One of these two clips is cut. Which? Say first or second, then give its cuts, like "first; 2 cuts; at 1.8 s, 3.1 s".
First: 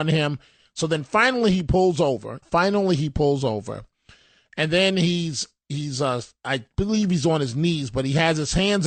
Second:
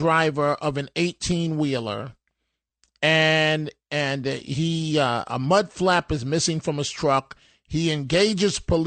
first; 1 cut; at 2.4 s